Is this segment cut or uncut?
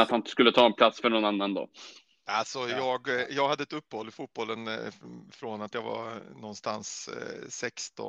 uncut